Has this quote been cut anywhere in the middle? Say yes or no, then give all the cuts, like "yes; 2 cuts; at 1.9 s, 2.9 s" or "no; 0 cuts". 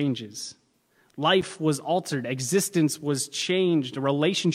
no; 0 cuts